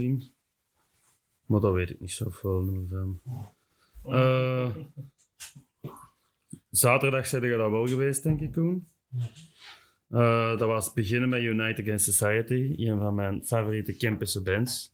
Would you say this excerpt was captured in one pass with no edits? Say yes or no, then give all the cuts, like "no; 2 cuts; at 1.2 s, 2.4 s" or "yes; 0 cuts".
yes; 0 cuts